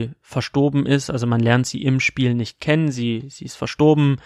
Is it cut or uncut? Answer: uncut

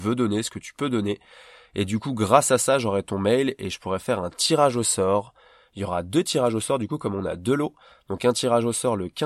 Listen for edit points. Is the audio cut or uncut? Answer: uncut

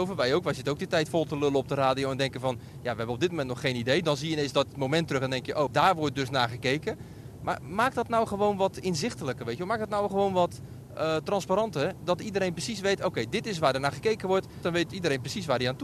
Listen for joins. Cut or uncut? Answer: cut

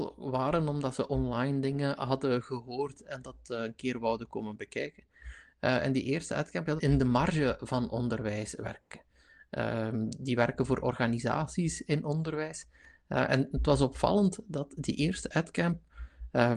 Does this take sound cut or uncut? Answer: cut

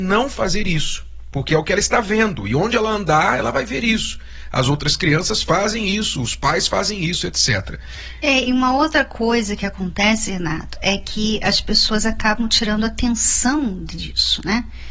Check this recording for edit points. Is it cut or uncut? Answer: uncut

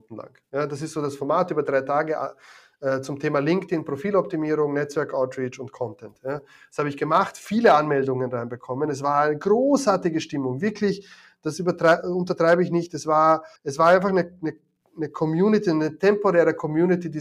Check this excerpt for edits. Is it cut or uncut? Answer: cut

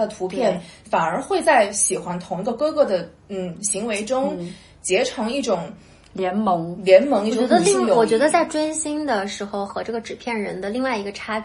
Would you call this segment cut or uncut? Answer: uncut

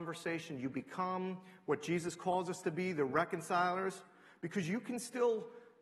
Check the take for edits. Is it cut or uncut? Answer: uncut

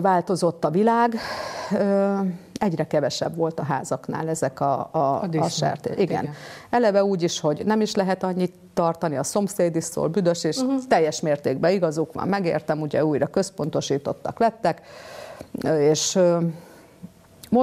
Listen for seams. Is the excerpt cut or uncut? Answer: uncut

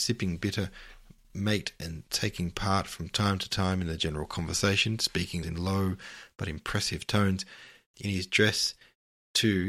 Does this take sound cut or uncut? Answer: cut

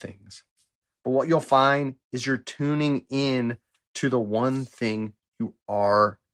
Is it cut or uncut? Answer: uncut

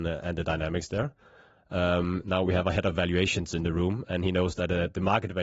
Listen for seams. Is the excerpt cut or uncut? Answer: uncut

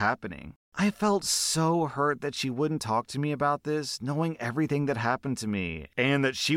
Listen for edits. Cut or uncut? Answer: uncut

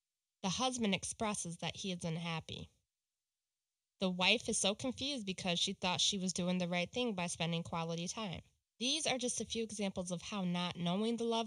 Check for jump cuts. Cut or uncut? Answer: cut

